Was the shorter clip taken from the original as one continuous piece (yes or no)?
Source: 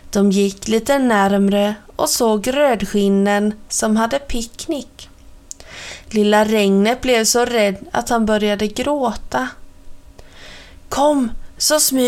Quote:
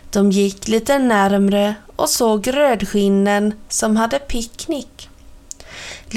yes